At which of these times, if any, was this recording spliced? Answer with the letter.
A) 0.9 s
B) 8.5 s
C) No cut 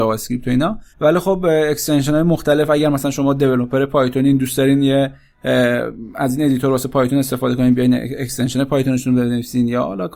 A